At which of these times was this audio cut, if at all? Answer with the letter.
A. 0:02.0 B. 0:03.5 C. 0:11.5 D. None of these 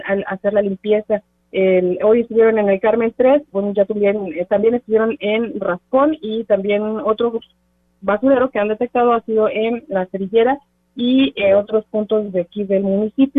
B